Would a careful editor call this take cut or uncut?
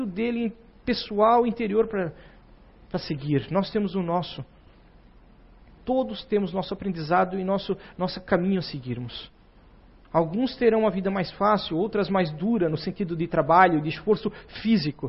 cut